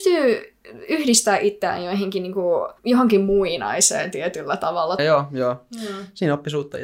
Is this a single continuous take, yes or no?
no